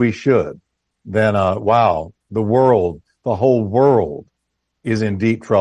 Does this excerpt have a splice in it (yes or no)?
yes